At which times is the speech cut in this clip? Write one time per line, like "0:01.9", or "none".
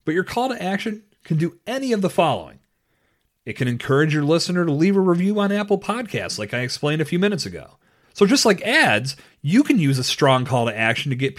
0:08.0